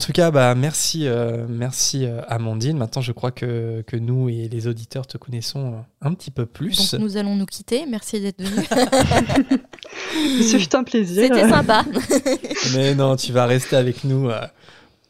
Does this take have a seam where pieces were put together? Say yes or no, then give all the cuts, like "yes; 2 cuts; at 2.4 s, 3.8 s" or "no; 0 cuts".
no; 0 cuts